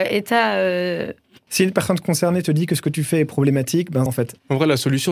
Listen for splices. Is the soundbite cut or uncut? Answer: cut